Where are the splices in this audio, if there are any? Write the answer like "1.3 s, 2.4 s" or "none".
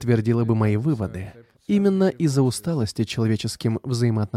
1.5 s